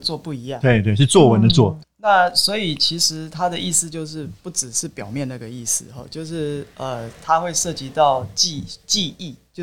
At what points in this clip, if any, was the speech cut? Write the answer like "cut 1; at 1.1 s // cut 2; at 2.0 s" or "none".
cut 1; at 1.8 s